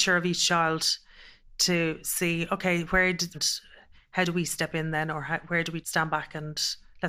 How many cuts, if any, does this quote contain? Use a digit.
2